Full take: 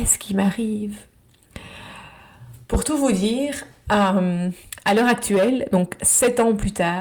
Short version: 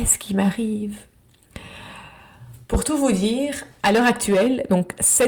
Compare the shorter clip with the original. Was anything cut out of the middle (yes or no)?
yes